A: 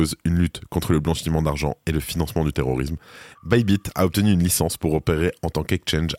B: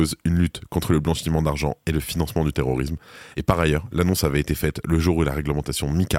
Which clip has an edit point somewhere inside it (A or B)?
A